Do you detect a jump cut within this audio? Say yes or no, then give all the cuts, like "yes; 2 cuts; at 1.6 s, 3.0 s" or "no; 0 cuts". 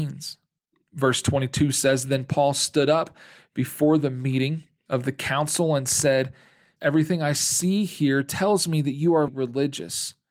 yes; 2 cuts; at 6.8 s, 9.3 s